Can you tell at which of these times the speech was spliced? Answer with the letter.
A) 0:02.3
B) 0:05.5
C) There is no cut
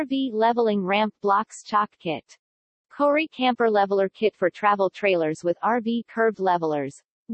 C